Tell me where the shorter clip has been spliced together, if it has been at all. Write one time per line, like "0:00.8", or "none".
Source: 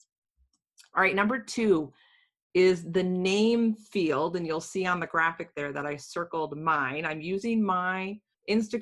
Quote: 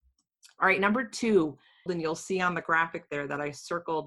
0:01.9